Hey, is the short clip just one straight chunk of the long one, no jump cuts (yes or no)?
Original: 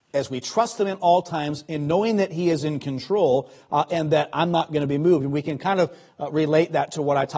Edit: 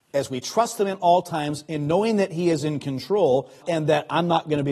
no